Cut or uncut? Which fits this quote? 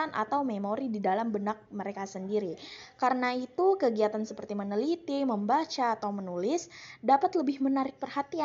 uncut